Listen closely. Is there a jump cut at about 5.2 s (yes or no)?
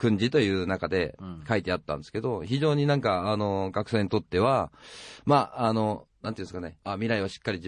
no